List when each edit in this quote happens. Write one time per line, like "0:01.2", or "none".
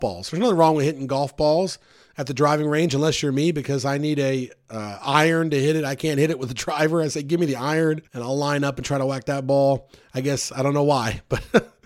0:08.1